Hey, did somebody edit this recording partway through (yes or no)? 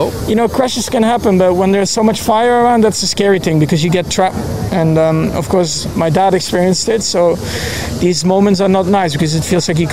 no